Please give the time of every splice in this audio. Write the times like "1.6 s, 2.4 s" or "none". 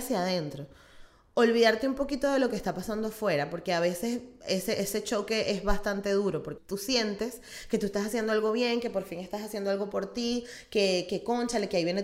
6.6 s

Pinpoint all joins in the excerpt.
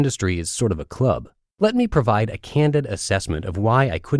1.5 s

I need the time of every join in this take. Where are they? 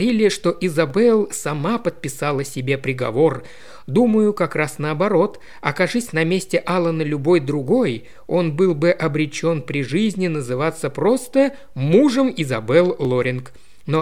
none

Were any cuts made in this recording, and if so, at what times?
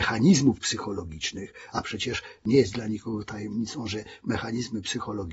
none

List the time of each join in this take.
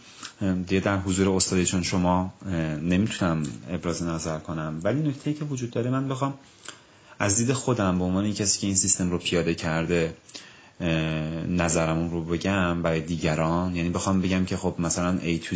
none

